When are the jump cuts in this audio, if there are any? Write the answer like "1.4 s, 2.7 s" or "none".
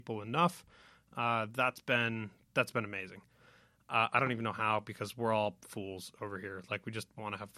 none